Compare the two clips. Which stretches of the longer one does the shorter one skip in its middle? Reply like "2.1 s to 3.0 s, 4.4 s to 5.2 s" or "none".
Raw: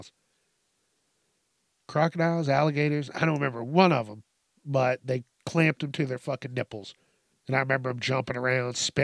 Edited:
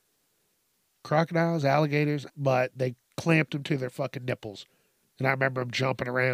3.1 s to 4.6 s